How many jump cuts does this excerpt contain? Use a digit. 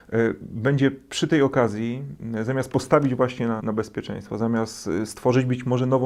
1